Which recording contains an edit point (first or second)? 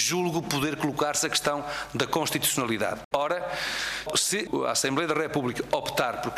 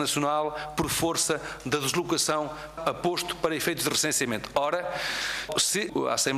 first